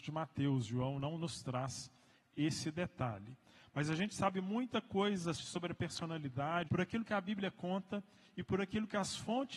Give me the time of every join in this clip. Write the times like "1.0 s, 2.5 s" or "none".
5.3 s, 6.6 s